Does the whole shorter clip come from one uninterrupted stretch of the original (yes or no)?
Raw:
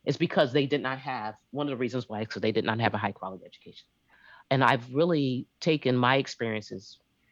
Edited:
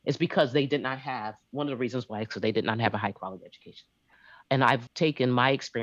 no